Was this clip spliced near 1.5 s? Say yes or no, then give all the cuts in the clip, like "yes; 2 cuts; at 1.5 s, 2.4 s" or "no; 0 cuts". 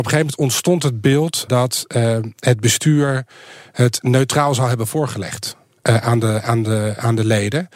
yes; 1 cut; at 1.5 s